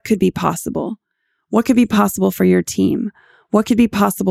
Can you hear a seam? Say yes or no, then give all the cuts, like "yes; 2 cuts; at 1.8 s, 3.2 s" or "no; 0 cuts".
no; 0 cuts